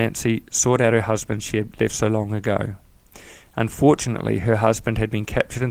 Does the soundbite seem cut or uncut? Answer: uncut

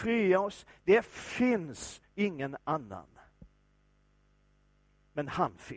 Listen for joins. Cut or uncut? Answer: uncut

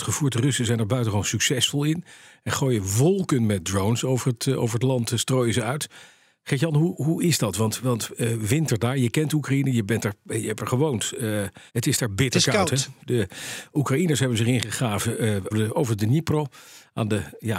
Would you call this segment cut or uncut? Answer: cut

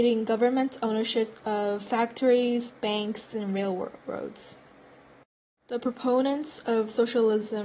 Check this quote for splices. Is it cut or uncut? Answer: uncut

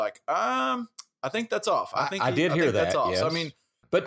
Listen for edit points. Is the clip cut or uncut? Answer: uncut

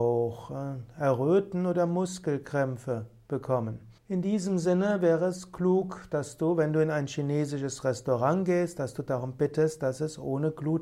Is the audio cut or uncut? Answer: cut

